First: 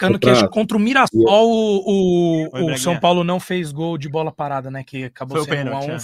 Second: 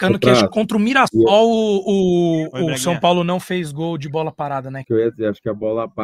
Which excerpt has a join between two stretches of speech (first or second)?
second